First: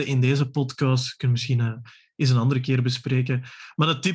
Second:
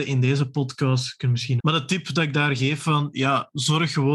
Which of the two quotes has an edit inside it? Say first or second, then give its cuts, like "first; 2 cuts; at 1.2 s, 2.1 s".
second; 1 cut; at 1.6 s